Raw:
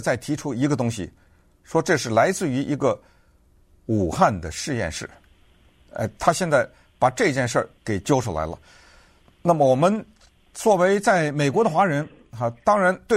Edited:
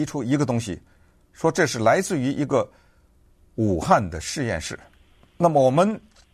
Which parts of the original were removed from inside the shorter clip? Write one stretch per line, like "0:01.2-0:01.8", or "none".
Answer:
0:05.5-0:09.3